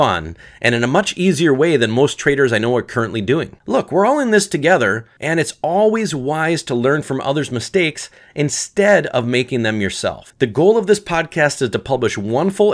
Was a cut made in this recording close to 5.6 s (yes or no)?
no